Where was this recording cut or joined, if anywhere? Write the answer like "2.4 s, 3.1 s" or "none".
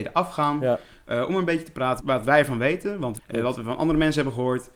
2.0 s, 3.2 s